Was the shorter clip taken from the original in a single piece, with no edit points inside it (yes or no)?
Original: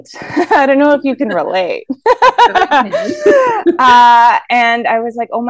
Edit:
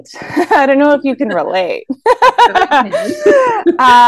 yes